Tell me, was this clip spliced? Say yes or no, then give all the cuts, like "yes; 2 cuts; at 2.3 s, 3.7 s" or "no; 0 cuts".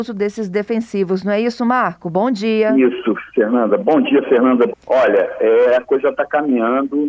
yes; 1 cut; at 4.7 s